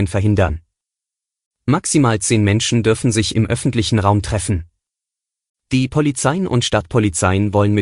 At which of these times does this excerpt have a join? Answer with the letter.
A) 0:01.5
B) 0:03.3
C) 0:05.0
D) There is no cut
D